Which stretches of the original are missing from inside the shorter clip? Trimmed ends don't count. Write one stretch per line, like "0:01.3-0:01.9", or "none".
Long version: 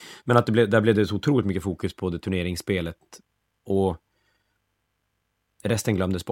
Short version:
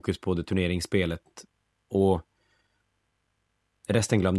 none